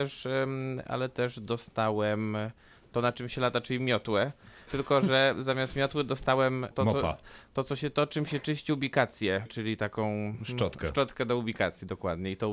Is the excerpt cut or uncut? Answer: uncut